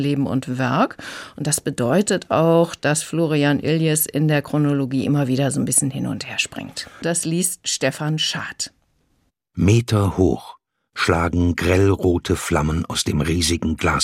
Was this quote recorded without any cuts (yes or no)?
no